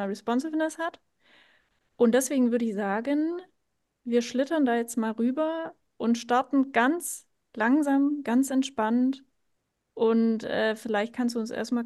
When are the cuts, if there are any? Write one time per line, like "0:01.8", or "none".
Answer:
none

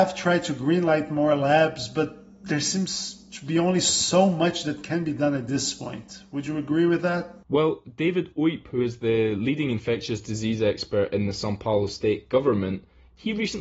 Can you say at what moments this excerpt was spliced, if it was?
none

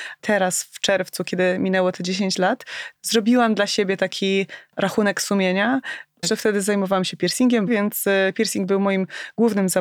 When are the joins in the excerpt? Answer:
0:03.0
0:06.2
0:07.7

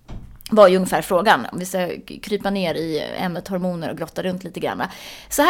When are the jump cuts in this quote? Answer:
0:01.5

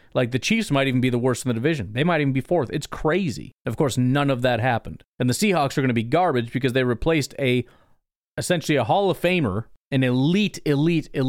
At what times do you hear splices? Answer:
none

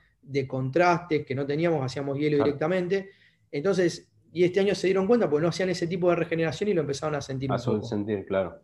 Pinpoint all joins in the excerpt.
none

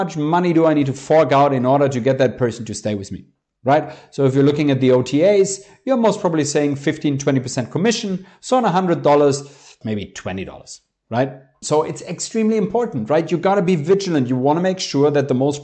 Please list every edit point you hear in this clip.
0:09.8
0:11.6

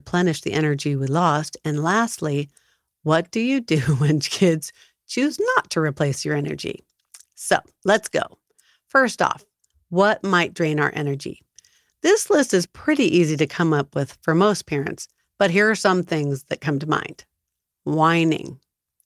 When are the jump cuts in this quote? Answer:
none

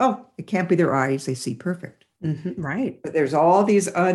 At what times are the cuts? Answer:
none

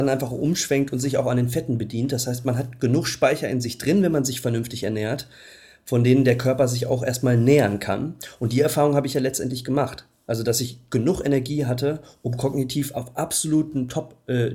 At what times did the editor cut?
none

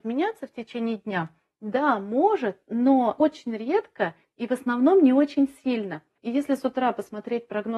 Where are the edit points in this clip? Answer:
none

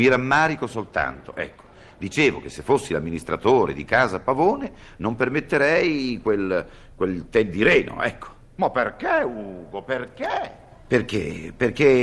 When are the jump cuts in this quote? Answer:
none

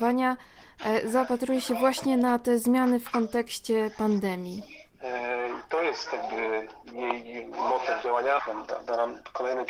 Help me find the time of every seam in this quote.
0:04.9
0:08.4

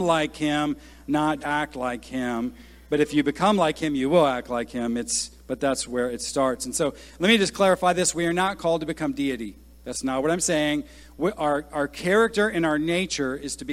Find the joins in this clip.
0:01.4

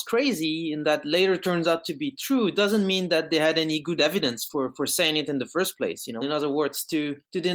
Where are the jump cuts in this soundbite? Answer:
0:06.2

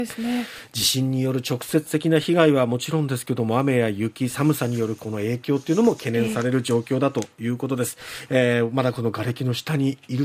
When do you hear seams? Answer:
0:08.3

